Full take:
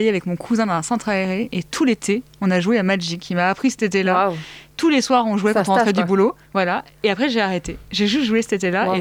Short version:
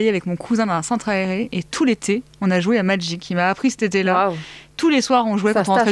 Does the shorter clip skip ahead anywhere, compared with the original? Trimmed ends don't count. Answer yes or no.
no